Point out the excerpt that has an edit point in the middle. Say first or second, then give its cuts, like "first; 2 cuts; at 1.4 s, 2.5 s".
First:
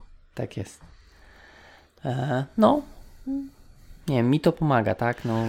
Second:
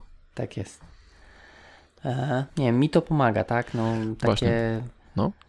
second; 1 cut; at 2.5 s